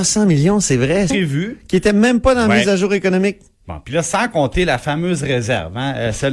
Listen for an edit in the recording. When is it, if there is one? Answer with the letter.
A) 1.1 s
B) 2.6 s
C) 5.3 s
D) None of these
A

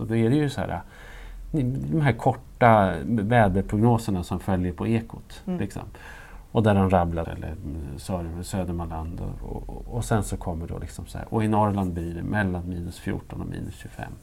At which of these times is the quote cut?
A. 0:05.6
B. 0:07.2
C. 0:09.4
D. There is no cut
B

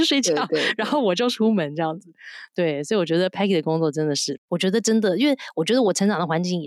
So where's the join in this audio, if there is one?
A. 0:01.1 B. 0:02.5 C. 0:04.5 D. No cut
C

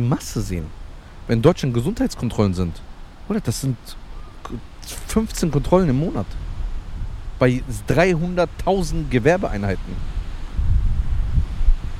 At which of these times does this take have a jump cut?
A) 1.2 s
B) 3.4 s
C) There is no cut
C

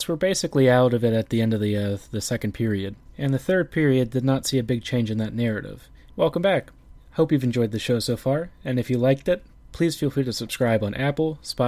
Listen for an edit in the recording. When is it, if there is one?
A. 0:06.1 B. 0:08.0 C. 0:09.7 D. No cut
A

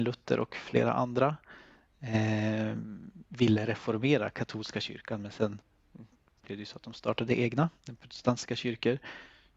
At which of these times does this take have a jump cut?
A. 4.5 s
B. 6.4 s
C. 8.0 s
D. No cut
C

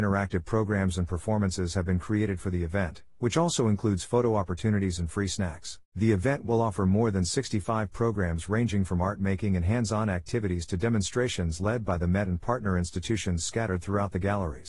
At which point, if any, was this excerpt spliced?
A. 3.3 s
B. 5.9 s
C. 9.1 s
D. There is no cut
B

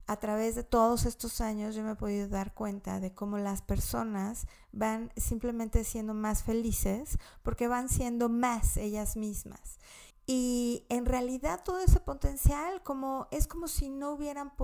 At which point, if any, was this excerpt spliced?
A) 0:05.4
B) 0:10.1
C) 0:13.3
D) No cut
B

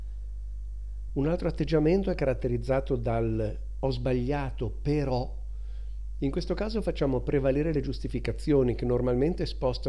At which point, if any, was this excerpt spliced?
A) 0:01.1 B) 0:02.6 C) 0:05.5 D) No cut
A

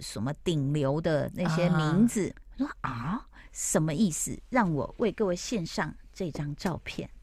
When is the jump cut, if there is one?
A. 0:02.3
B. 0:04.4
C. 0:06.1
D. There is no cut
A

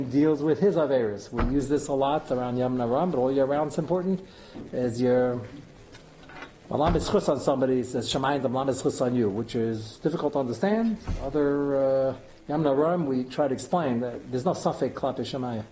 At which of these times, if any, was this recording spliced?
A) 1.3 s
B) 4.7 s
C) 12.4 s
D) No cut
D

